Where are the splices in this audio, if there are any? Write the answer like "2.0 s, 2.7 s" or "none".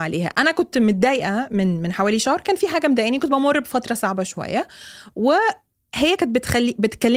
none